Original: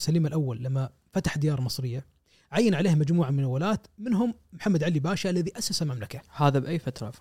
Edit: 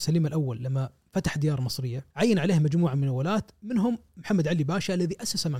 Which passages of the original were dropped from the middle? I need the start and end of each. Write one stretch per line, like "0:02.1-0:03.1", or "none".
0:02.1-0:02.5

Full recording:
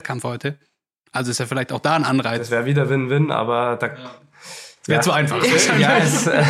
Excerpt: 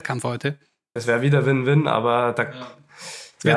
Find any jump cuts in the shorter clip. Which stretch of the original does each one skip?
0:01.0-0:02.4

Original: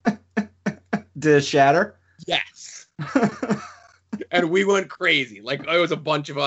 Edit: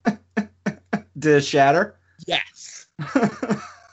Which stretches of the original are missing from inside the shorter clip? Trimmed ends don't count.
none

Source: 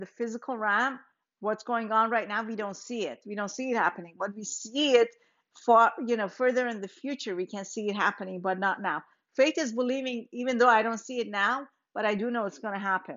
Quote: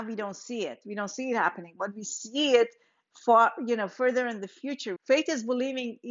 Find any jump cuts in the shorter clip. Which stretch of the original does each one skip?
0:07.4-0:09.2

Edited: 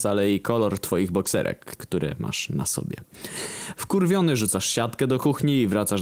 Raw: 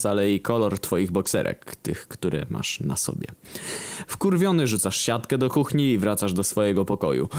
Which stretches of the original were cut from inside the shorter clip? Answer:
0:01.8-0:02.1

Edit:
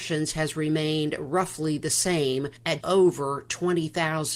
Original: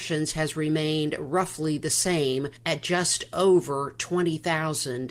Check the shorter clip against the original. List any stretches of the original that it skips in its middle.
0:02.8-0:03.3

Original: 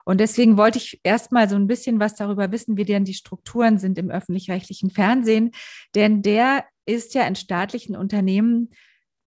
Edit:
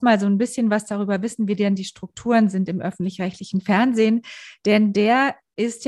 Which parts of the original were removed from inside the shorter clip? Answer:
none

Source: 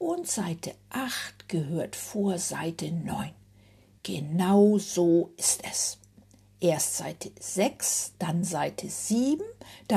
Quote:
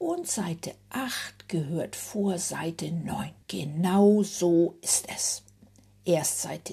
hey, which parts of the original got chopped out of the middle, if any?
0:03.4-0:04.0

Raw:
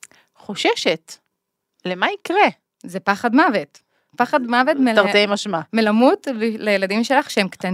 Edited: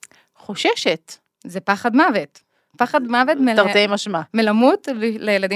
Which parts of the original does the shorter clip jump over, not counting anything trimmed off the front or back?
0:01.3-0:02.7

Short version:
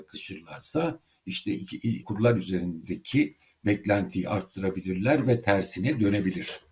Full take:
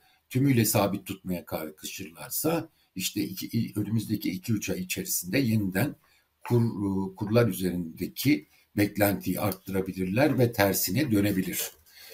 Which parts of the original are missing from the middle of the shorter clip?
0:03.7-0:07.1

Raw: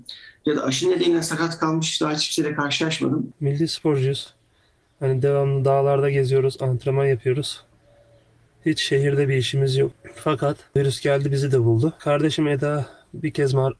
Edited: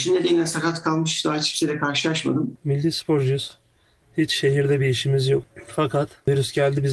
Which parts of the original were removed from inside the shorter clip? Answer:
0:04.8-0:08.5

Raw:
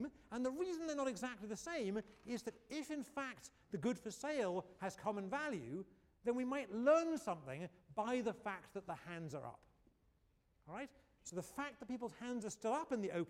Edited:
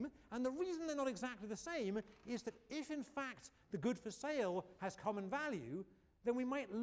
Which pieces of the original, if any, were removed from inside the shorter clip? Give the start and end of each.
none

